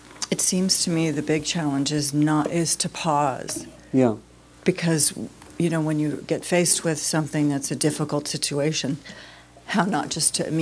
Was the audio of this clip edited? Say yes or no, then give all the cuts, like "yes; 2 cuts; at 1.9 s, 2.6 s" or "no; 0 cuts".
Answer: no; 0 cuts